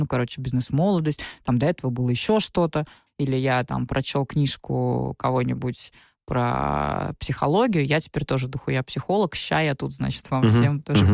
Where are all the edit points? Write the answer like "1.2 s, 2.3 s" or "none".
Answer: 3.1 s